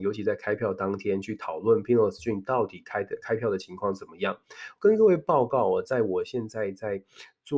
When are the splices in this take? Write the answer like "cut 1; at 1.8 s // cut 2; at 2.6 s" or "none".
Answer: none